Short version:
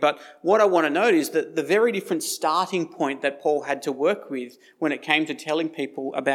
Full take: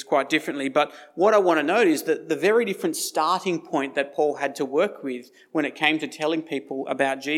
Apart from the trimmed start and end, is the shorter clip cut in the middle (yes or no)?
no